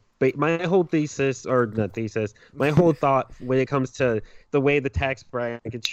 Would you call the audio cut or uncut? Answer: cut